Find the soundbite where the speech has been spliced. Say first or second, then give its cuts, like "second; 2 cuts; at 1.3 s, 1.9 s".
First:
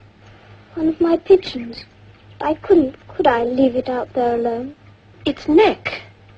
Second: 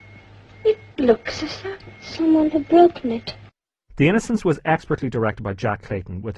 first; 1 cut; at 5.1 s